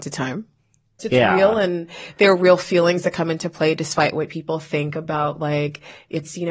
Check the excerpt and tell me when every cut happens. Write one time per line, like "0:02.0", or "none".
0:01.0